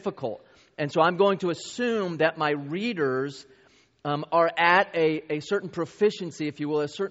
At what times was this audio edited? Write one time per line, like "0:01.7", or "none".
none